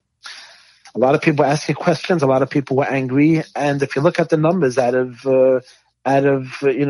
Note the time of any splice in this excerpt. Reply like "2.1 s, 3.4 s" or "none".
none